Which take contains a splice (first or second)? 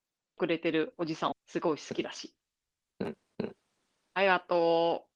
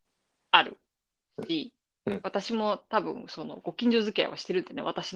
first